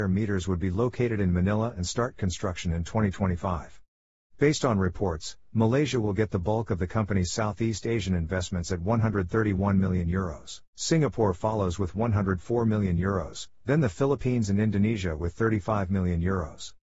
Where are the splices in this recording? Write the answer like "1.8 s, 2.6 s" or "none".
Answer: 4.2 s, 10.7 s